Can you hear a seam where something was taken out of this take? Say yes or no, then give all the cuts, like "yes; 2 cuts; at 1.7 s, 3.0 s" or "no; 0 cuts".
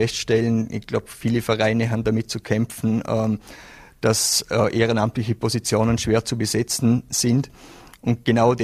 no; 0 cuts